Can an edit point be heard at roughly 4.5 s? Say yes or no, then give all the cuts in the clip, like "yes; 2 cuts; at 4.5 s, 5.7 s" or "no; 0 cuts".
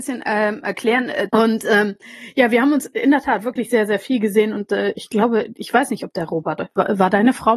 no; 1 cut; at 1.3 s